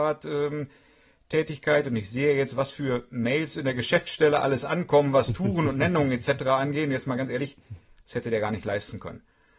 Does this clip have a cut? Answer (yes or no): no